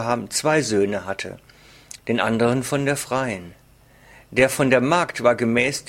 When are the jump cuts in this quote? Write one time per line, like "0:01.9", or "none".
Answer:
0:02.0